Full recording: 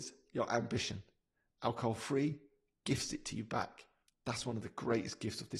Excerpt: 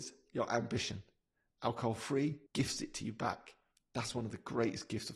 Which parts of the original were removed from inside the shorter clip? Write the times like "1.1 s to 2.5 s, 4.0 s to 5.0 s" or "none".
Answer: 2.5 s to 2.8 s